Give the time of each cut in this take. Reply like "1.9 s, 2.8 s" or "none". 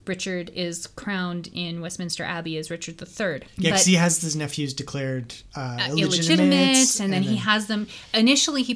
3.5 s